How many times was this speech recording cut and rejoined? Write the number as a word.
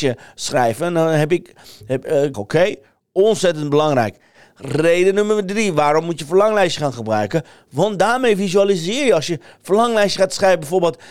one